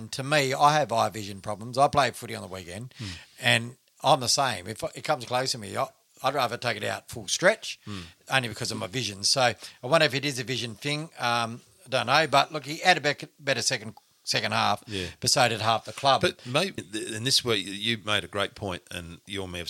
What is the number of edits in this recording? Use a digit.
1